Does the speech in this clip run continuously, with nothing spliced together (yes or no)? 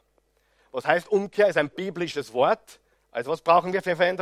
no